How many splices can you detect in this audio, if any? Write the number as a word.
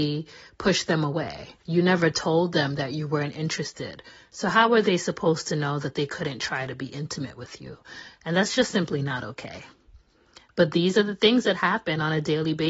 one